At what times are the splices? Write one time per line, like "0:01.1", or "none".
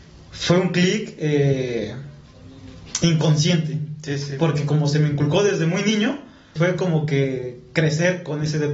0:06.6